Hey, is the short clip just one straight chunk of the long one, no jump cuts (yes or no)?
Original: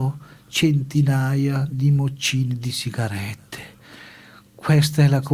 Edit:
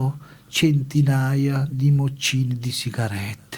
yes